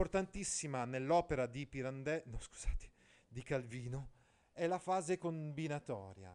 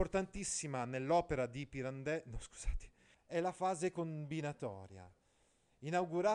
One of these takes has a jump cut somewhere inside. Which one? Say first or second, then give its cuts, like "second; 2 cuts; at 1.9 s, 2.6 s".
second; 1 cut; at 3.1 s